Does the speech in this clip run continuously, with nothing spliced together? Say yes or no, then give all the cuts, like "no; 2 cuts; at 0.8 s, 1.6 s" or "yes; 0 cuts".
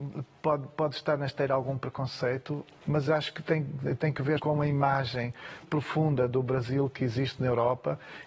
no; 3 cuts; at 2.8 s, 4.4 s, 5.6 s